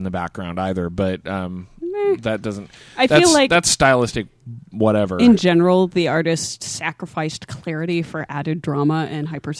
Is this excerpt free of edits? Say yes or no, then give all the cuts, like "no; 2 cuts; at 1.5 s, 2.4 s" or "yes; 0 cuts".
yes; 0 cuts